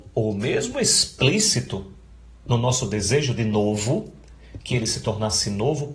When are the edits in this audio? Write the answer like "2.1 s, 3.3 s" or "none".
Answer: none